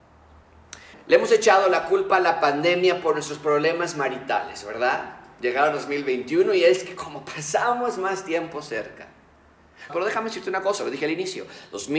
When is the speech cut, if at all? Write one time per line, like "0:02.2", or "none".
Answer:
0:00.9
0:09.9